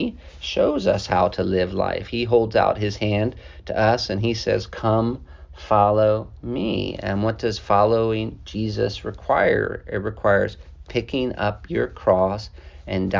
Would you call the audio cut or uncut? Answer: uncut